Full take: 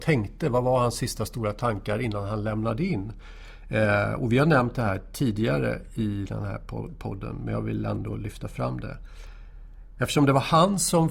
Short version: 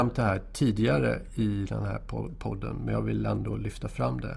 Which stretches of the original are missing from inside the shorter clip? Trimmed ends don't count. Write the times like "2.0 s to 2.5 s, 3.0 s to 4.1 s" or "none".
none